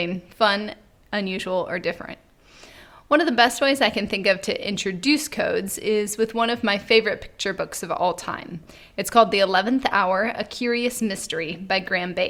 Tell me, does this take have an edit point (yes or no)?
no